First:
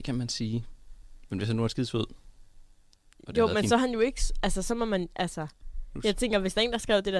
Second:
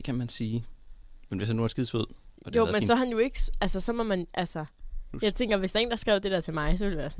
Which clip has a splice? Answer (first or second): second